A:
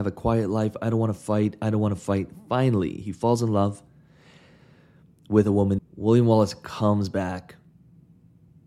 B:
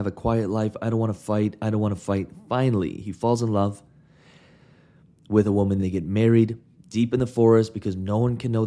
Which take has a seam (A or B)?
A